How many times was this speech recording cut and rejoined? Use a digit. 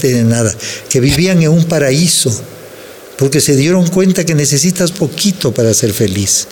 1